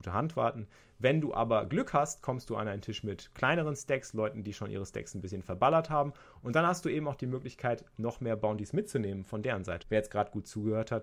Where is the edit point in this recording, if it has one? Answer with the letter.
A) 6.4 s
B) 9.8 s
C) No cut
B